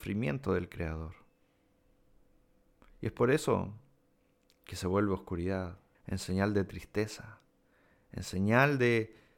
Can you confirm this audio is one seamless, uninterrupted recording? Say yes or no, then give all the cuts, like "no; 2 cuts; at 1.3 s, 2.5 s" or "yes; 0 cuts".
no; 1 cut; at 5.9 s